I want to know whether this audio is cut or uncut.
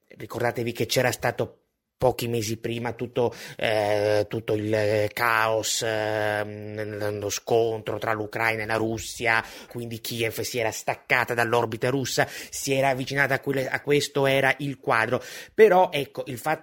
cut